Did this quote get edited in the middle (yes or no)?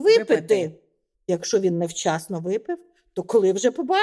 no